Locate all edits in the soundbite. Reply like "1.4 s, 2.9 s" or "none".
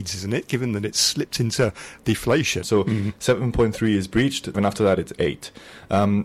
2.6 s, 4.5 s